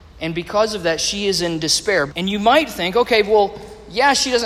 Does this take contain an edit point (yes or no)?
yes